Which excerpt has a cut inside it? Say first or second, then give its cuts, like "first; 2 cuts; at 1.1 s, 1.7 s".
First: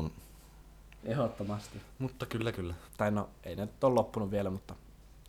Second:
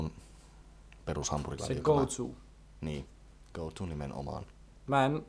first; 2 cuts; at 1.0 s, 2.9 s